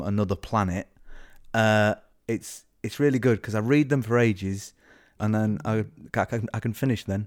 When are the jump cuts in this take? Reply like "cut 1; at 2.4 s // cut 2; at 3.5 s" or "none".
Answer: cut 1; at 2.1 s // cut 2; at 5.2 s